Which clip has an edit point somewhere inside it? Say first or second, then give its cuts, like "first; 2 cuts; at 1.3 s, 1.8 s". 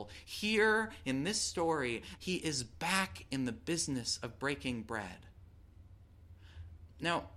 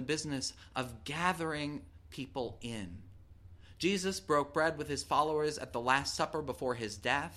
first; 1 cut; at 2.2 s